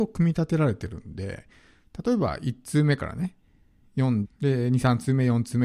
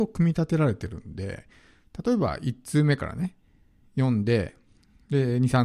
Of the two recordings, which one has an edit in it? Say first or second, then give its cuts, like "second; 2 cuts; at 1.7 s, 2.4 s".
first; 1 cut; at 4.2 s